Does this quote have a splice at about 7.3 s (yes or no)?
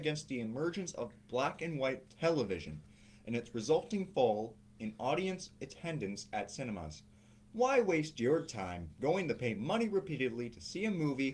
no